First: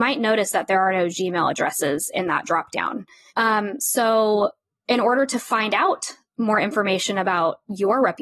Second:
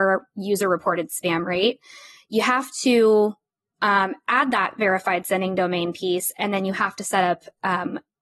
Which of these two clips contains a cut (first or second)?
first